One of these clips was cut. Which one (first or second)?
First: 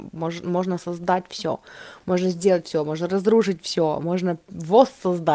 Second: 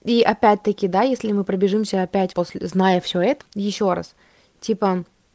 second